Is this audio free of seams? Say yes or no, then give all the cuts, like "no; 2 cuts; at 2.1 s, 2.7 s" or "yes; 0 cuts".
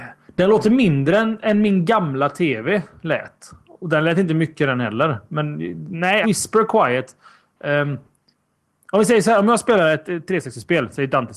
no; 1 cut; at 6.2 s